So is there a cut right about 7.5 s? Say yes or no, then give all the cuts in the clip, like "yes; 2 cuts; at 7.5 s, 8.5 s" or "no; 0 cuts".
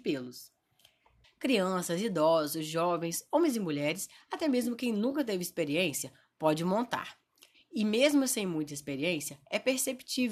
yes; 2 cuts; at 1.2 s, 7.5 s